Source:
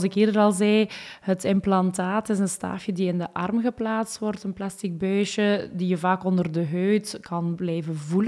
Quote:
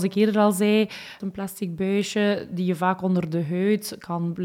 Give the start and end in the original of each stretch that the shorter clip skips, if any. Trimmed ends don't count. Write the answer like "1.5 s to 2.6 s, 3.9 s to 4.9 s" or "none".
1.2 s to 4.4 s